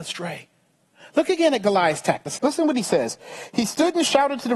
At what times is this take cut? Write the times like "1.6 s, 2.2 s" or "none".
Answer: 2.4 s